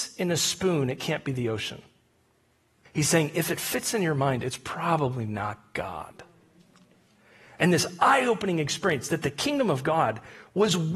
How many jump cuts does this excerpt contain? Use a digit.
1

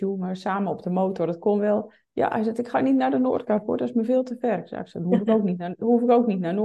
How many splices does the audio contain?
0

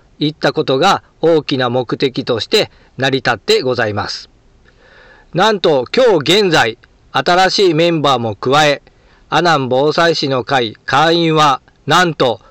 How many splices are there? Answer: 0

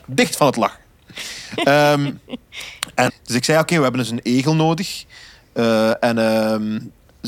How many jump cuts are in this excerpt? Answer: 1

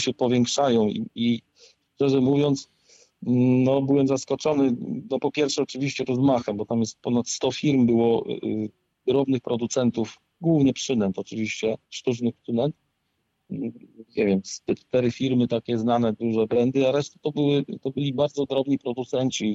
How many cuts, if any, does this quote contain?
2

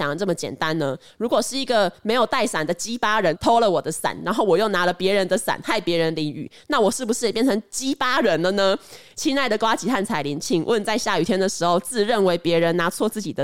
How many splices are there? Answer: 0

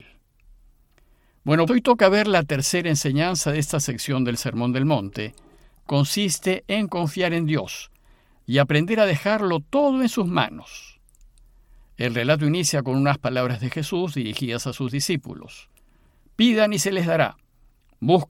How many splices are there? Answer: 2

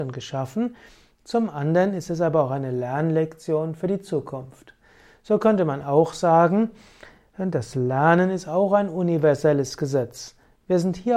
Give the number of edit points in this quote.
0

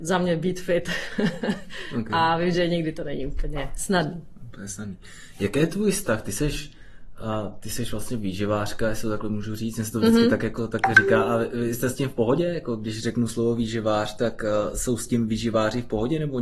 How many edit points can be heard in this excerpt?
0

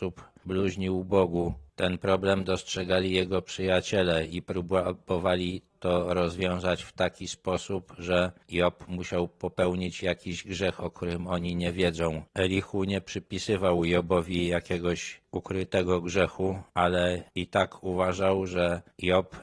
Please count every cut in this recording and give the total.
0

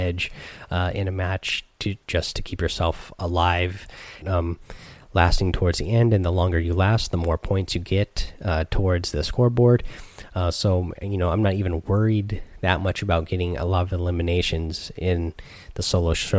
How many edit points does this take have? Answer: 1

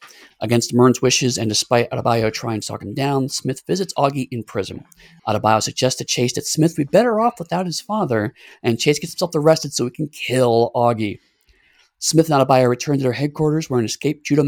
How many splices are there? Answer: 1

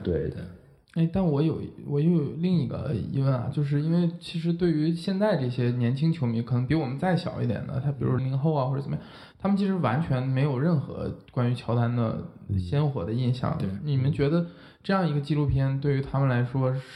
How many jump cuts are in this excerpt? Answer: 1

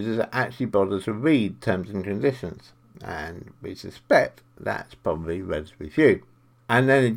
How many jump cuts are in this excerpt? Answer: 0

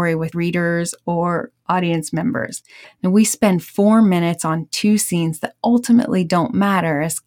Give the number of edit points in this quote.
1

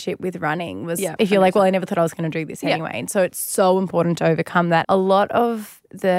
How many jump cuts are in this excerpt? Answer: 2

